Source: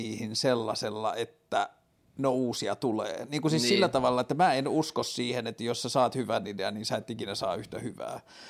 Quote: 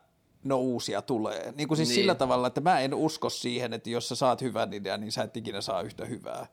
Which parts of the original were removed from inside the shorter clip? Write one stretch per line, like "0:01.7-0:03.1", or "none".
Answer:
none